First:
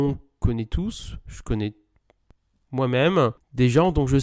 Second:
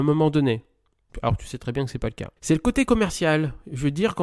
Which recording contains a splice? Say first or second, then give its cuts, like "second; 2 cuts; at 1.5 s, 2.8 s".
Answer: second; 2 cuts; at 1.1 s, 2.4 s